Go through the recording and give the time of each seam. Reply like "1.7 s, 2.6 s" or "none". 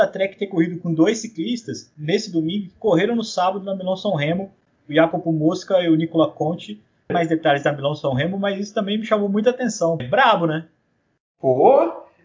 7.1 s, 10.0 s